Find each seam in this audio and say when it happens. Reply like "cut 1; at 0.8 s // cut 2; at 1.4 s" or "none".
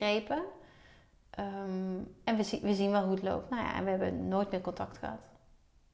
none

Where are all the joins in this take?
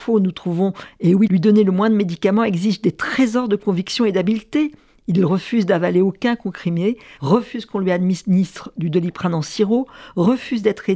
cut 1; at 1.3 s // cut 2; at 7.2 s

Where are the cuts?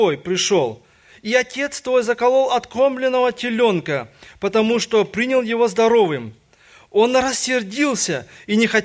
none

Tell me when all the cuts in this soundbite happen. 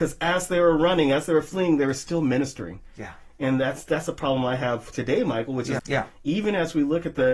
cut 1; at 5.8 s

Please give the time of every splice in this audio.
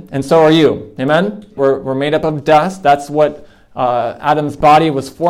cut 1; at 1.6 s

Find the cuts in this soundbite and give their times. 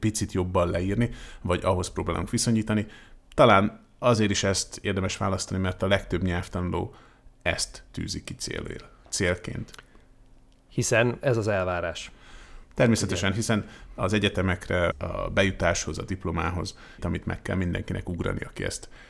cut 1; at 14.9 s // cut 2; at 17.0 s

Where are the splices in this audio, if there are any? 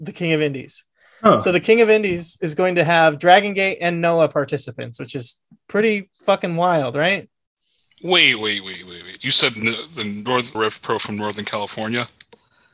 cut 1; at 10.5 s

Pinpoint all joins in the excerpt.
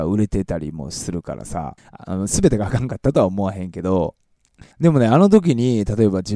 cut 1; at 1.8 s // cut 2; at 4.7 s

